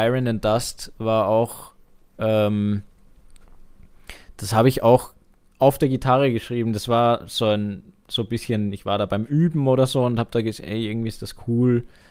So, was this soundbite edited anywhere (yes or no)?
no